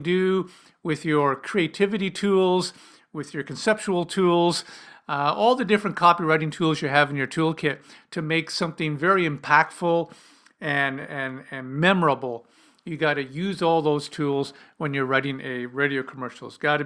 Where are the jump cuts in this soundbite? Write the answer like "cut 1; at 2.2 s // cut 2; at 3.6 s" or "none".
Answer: none

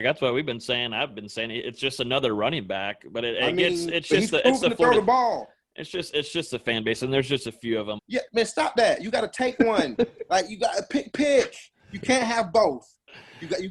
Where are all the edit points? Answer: cut 1; at 8.0 s

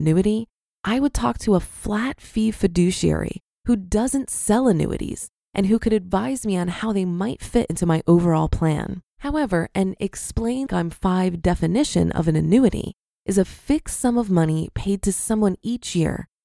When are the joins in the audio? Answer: cut 1; at 9.1 s // cut 2; at 10.7 s

